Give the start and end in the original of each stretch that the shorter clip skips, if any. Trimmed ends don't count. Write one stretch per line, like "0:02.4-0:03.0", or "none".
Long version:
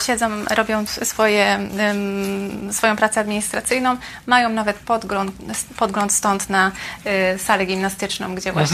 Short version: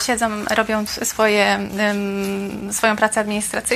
none

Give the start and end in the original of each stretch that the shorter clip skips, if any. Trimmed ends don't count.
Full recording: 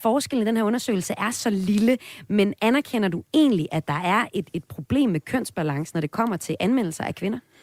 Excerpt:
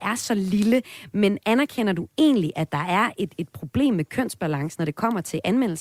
none

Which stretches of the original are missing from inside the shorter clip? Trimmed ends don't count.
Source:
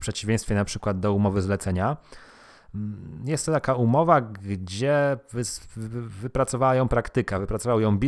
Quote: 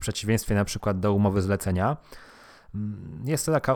none

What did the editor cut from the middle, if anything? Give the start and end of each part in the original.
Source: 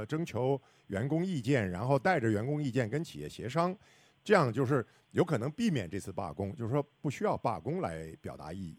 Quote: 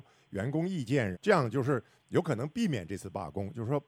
0:01.7-0:04.2

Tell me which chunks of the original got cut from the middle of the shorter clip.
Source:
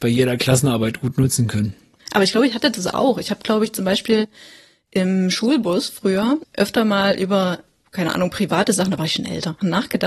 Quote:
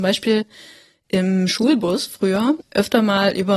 none

